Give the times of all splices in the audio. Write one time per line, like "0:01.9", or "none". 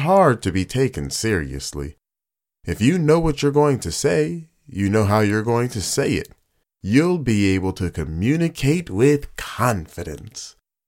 0:06.6